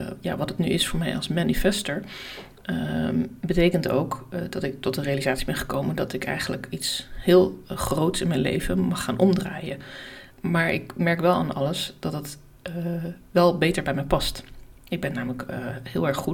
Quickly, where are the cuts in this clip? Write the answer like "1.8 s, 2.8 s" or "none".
10.3 s